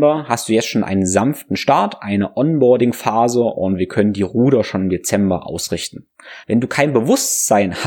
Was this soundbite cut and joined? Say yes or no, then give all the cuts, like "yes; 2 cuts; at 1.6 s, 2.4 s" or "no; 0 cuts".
yes; 1 cut; at 6.4 s